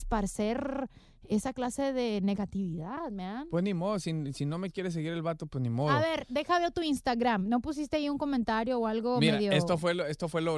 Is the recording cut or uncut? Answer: uncut